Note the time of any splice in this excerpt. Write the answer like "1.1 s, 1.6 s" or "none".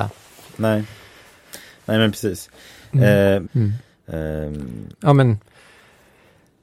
3.4 s, 4.9 s